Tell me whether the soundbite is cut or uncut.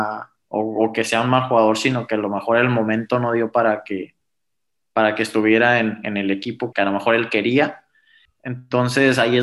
cut